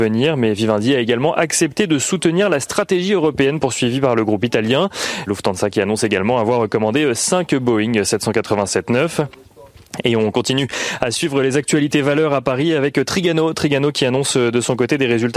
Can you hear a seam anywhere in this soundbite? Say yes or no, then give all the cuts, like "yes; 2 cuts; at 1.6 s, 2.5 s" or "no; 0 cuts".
yes; 1 cut; at 5.3 s